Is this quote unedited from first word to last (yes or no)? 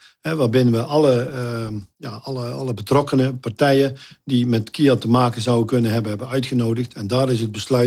yes